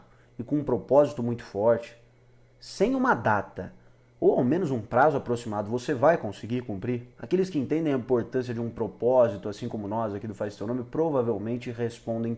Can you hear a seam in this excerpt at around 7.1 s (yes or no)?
yes